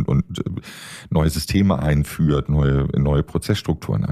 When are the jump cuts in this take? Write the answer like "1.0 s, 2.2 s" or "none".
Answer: none